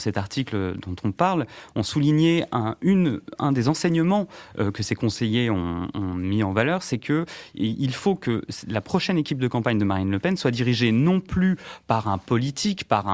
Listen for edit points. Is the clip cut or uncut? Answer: cut